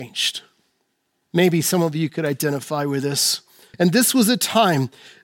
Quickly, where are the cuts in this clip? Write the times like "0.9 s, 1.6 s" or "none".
1.2 s, 3.7 s